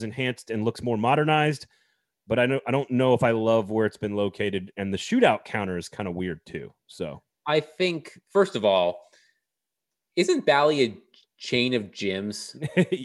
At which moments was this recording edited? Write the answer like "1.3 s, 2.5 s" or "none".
none